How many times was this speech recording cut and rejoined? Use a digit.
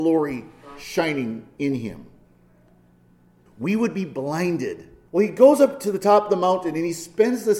2